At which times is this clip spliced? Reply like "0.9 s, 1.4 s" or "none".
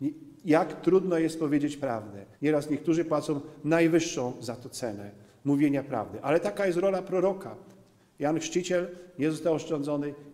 2.3 s